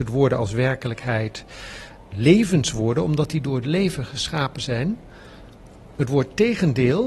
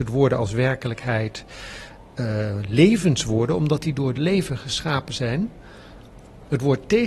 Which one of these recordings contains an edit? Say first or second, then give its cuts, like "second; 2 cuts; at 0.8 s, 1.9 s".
first; 1 cut; at 2.1 s